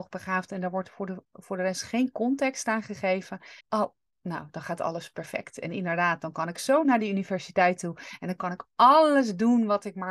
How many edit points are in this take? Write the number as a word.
one